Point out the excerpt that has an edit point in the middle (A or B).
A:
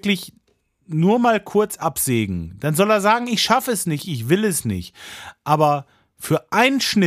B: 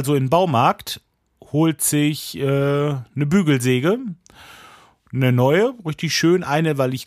A